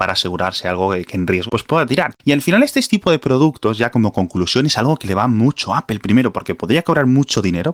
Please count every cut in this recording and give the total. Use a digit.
1